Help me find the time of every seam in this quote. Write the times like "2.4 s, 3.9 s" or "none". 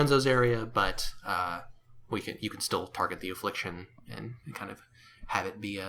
none